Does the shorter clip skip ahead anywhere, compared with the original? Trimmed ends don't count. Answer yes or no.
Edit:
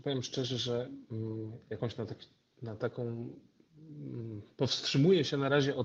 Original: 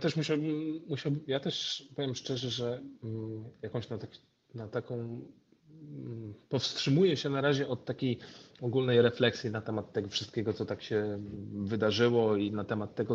no